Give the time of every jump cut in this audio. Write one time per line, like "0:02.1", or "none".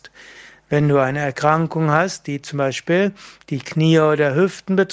none